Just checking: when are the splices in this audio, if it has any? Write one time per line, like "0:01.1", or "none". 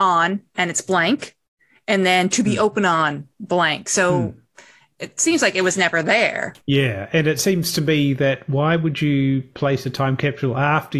0:06.6